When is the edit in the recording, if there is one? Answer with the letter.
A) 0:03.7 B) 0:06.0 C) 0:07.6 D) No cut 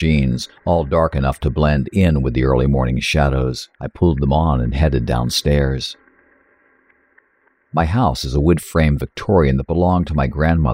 A